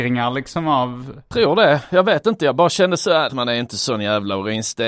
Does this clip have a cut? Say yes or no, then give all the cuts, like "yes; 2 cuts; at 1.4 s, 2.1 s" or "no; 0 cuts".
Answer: yes; 1 cut; at 3.3 s